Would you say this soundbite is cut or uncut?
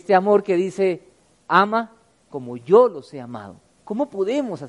uncut